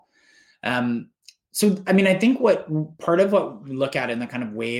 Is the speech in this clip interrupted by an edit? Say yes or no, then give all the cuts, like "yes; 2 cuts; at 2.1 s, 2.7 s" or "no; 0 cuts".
no; 0 cuts